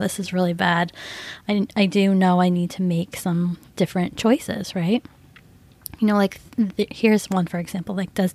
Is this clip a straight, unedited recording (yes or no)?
yes